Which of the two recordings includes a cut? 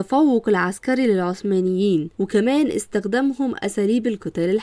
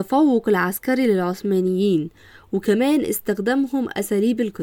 first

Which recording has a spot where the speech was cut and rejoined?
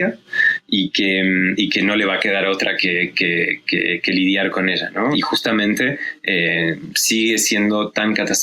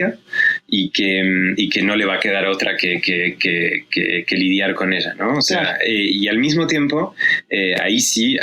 first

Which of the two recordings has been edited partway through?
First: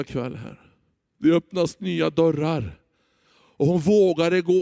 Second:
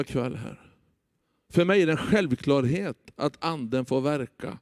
first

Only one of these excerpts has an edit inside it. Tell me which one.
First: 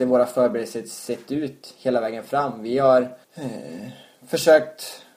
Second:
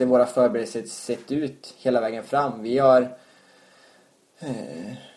first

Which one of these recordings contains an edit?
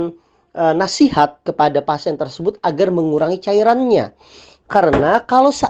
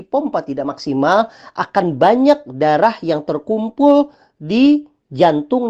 first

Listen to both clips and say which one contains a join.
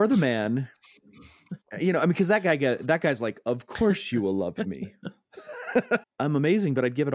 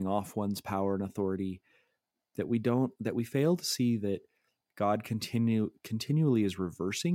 first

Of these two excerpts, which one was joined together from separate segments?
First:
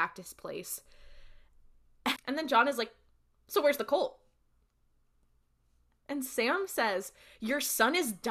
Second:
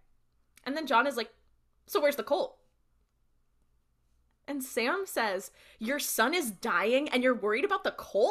first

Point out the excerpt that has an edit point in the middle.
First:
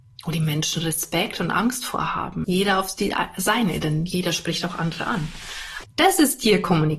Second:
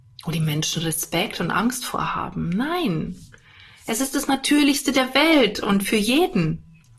first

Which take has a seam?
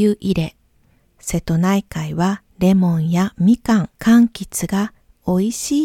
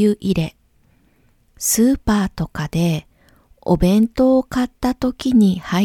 first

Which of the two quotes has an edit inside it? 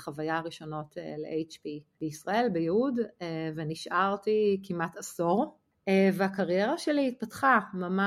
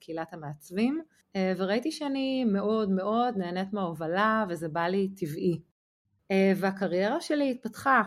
second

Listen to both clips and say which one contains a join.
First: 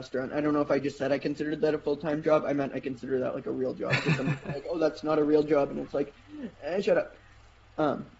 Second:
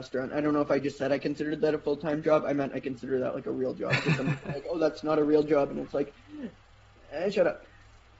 first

